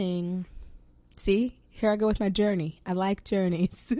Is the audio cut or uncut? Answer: uncut